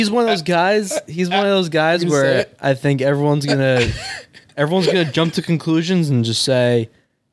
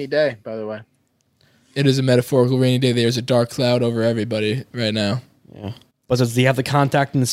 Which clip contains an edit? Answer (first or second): second